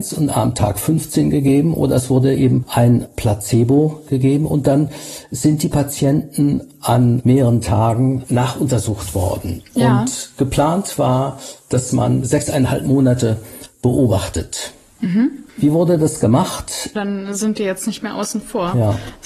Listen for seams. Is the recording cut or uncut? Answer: cut